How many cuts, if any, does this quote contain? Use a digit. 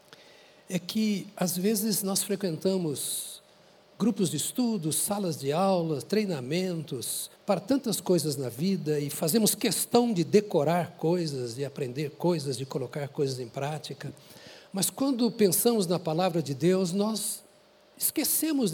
1